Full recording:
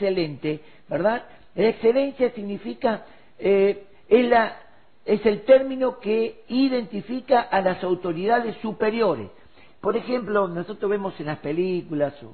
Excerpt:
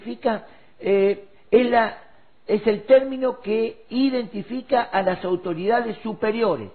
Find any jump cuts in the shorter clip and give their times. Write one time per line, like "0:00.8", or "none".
none